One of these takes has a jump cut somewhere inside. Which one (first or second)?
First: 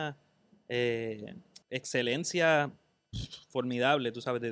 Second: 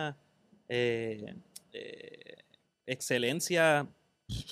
first